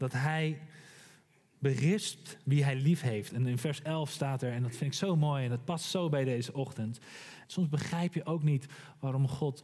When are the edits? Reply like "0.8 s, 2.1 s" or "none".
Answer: 3.3 s, 7.4 s